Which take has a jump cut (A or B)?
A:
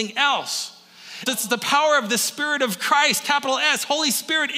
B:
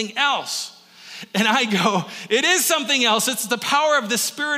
A